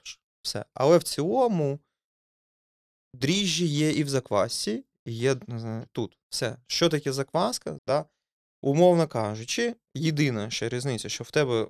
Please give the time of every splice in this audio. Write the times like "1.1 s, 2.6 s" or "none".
7.8 s